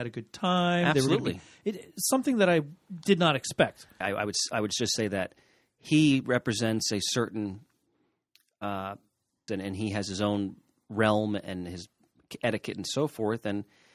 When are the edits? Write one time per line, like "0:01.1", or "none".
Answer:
0:04.0
0:09.5